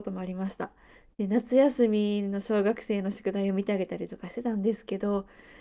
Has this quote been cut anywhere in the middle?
no; 0 cuts

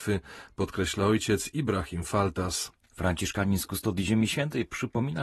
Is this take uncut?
yes; 0 cuts

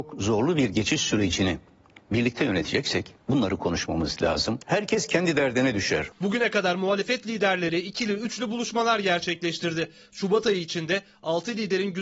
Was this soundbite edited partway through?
yes; 1 cut; at 4.6 s

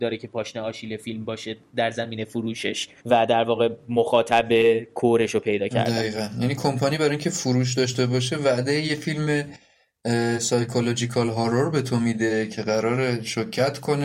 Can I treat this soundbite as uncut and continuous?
no; 1 cut; at 3.0 s

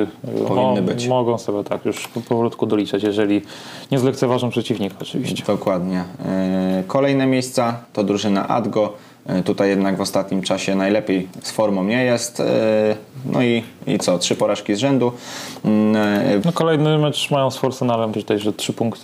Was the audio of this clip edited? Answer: yes; 2 cuts; at 16.4 s, 18.1 s

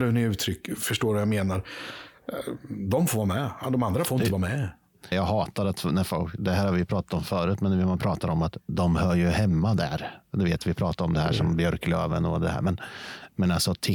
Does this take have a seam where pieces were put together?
yes; 1 cut; at 5.1 s

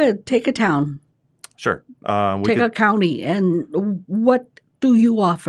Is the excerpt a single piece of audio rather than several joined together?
yes; 0 cuts

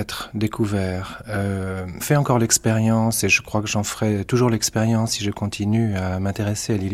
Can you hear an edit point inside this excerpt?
yes; 1 cut; at 2.0 s

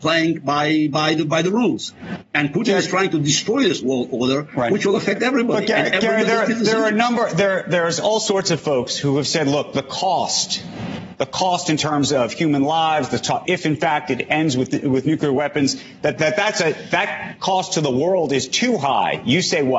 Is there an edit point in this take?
yes; 2 cuts; at 13.4 s, 16.2 s

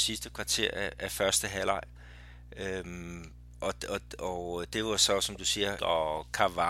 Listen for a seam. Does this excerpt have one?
yes; 1 cut; at 5.8 s

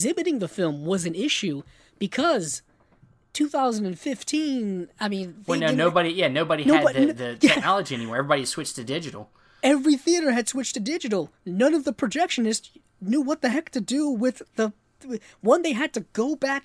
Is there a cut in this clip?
no; 0 cuts

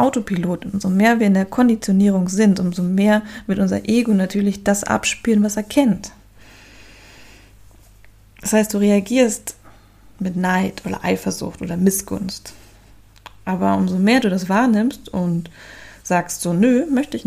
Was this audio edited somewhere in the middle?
no; 0 cuts

